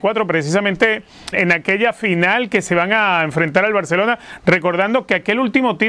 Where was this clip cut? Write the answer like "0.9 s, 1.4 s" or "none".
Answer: 1.3 s

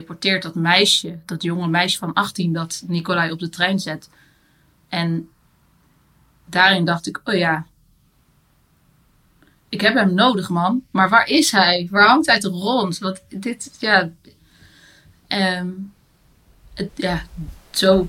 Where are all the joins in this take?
16.9 s

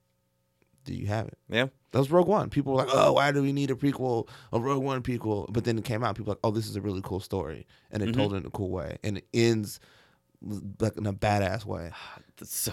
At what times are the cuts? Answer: none

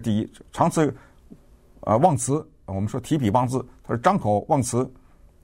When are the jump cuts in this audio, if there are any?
none

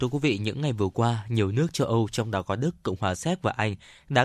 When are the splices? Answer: none

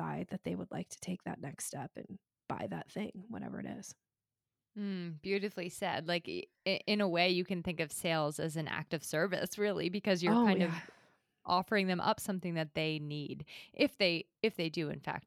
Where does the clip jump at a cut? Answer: none

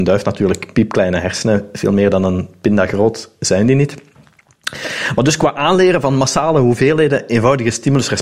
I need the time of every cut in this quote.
none

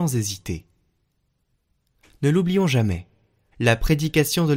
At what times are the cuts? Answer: 3.5 s

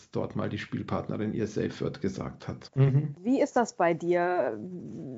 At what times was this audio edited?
2.7 s

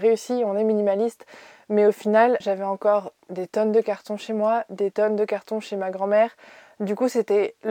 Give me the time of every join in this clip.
2.4 s

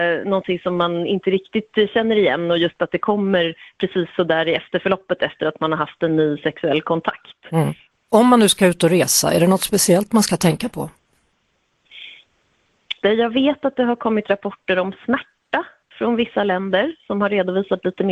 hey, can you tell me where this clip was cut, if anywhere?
7.9 s, 13.0 s

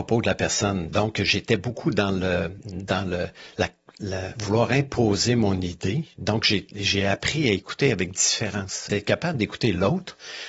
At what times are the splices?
8.9 s

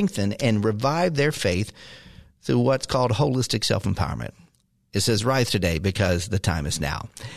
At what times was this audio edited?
none

